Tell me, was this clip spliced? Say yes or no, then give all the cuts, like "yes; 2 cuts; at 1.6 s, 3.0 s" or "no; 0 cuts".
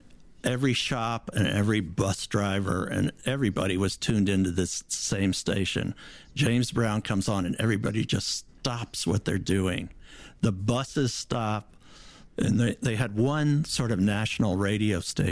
yes; 1 cut; at 12.3 s